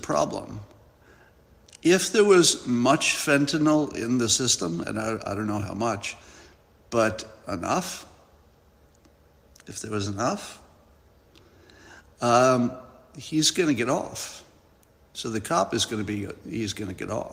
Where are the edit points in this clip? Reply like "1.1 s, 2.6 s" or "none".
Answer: none